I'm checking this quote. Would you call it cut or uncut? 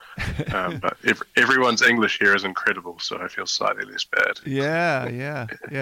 uncut